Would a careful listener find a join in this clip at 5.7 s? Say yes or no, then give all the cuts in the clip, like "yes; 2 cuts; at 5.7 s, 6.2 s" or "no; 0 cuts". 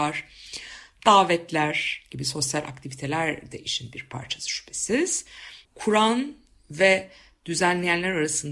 yes; 1 cut; at 5.7 s